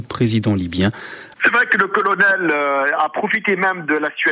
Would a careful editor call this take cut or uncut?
cut